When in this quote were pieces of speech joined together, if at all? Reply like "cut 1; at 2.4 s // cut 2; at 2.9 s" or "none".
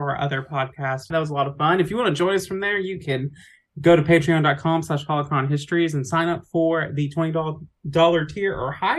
cut 1; at 1.1 s